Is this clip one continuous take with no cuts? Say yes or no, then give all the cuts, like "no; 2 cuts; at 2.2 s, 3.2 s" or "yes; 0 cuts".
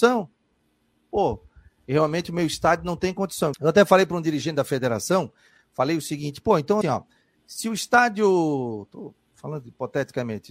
no; 2 cuts; at 3.5 s, 6.8 s